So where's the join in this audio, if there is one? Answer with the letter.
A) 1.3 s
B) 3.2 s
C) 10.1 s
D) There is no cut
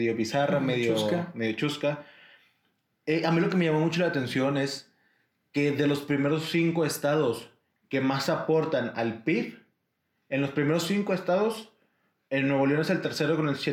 D